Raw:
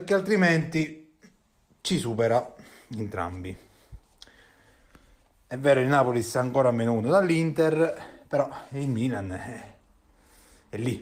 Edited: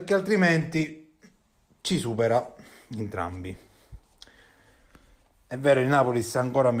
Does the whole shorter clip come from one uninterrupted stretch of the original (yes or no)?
yes